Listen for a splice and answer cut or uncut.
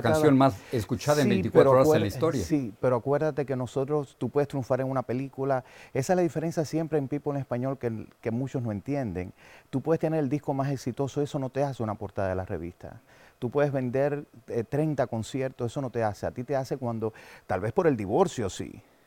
uncut